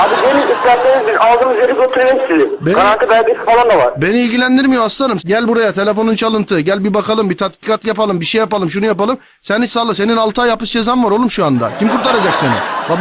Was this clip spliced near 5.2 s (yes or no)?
yes